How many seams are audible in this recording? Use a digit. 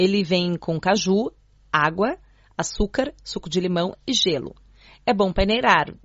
0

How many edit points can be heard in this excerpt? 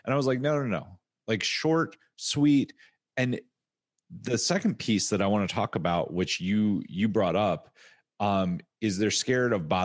0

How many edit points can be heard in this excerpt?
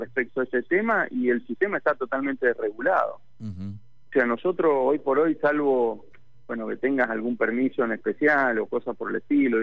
0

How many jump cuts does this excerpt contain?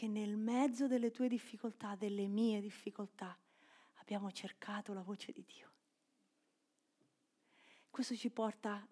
0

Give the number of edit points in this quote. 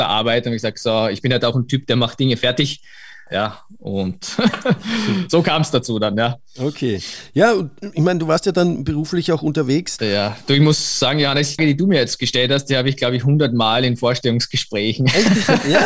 3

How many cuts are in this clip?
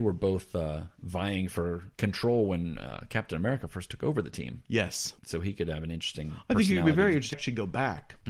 1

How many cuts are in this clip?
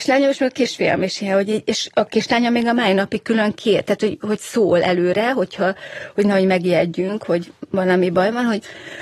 0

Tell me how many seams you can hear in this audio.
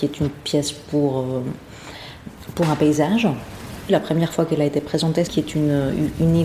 2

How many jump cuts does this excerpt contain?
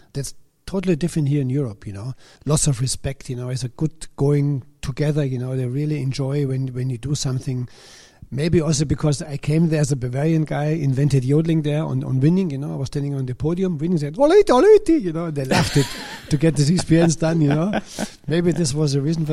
1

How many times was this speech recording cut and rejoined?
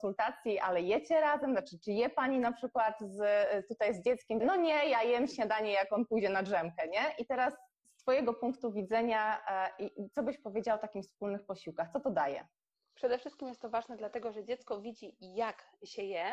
1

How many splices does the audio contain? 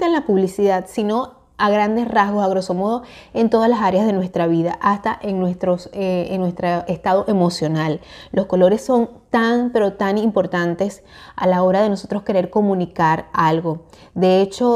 0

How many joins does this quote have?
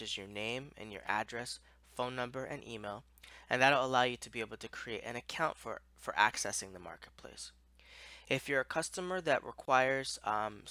0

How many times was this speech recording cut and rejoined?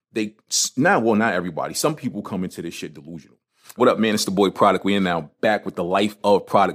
1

